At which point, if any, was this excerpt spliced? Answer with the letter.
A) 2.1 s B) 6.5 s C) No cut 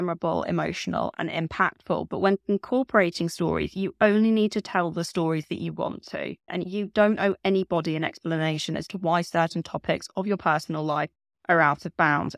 B